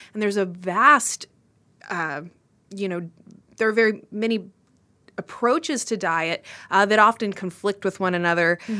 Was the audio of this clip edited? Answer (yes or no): no